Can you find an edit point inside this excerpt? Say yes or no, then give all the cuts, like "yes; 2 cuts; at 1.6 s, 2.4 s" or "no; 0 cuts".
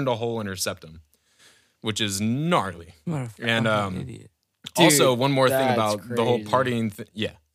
no; 0 cuts